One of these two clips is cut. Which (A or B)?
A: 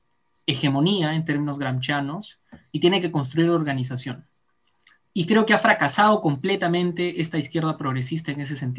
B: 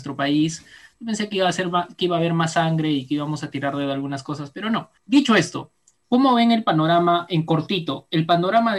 B